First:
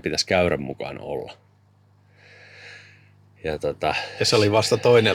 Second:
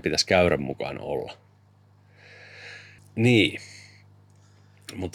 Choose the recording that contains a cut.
second; 1 cut; at 3.0 s

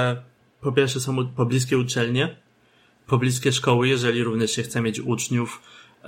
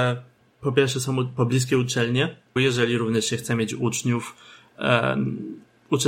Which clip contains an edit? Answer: second; 1 cut; at 2.6 s

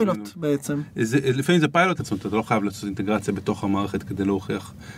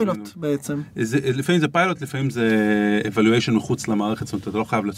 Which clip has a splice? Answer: first; 1 cut; at 2.0 s

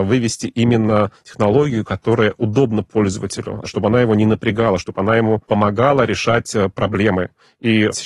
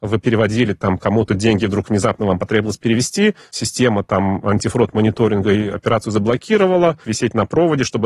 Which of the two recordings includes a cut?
second; 1 cut; at 7.0 s

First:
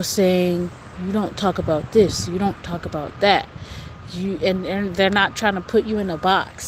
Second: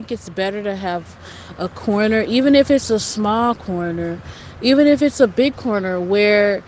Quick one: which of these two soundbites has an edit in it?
first; 1 cut; at 1.0 s

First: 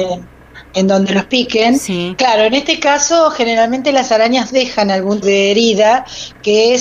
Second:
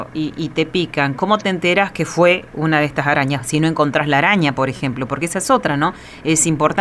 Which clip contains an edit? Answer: first; 2 cuts; at 2.2 s, 5.2 s

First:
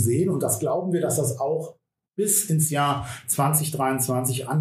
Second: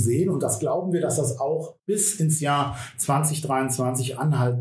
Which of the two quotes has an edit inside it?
second; 1 cut; at 1.8 s

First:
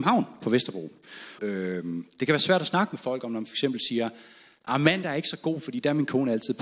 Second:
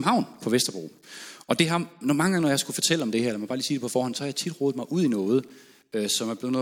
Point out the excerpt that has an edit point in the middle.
first; 1 cut; at 1.4 s

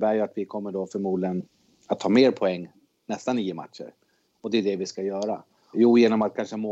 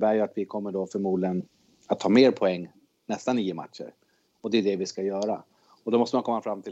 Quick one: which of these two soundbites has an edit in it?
first; 1 cut; at 5.7 s

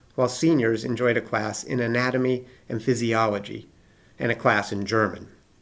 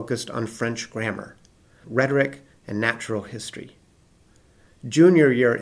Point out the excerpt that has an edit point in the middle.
second; 1 cut; at 1.8 s

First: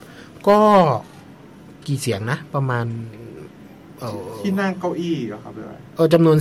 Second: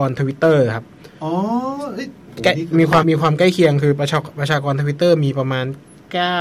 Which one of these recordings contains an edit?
second; 1 cut; at 3.0 s

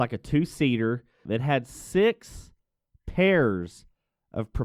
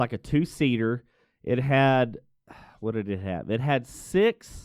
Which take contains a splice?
first; 1 cut; at 1.3 s

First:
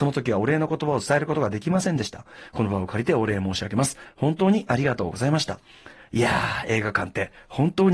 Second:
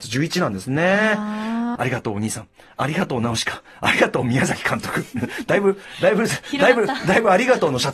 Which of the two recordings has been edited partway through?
second; 1 cut; at 1.8 s

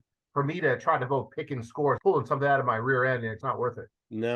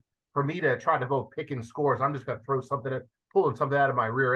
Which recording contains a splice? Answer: first; 2 cuts; at 2.0 s, 3.4 s

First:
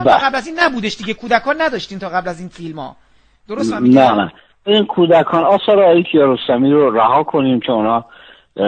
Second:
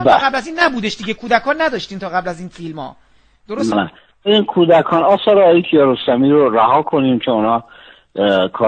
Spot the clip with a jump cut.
second; 1 cut; at 3.7 s

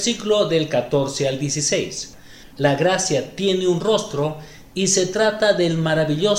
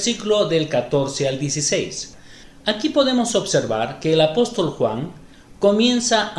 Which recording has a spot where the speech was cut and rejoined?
first; 1 cut; at 2.5 s

